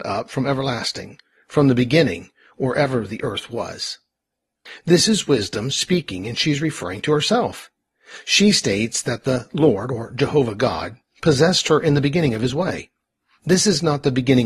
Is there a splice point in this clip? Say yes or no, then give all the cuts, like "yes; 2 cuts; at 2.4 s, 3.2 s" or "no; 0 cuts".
no; 0 cuts